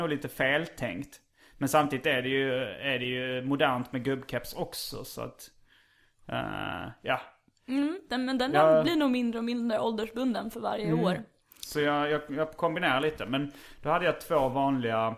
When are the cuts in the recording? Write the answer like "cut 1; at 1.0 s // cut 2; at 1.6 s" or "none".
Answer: none